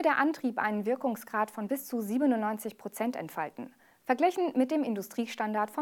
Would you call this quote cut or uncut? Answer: uncut